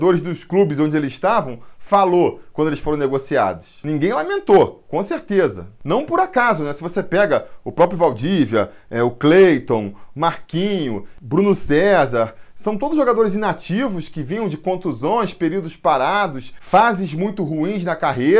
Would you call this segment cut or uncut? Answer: uncut